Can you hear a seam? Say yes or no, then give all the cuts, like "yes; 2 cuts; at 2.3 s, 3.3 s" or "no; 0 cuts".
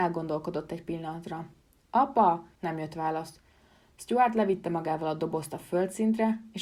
yes; 1 cut; at 2.6 s